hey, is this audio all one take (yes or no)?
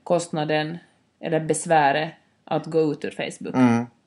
yes